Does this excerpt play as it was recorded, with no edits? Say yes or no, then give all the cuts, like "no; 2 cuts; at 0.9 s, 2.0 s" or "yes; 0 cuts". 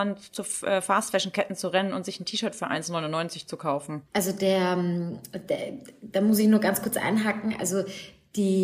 no; 1 cut; at 4.0 s